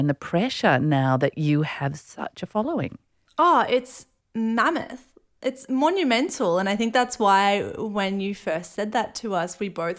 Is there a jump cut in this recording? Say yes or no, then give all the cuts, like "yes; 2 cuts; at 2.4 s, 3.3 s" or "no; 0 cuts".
no; 0 cuts